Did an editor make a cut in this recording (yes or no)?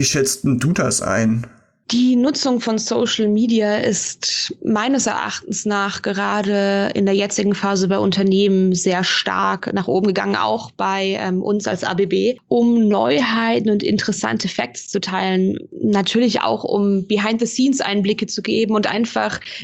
no